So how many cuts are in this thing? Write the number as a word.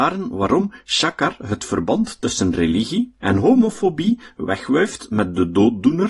one